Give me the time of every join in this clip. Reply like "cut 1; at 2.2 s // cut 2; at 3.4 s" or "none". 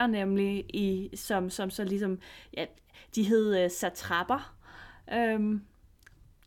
none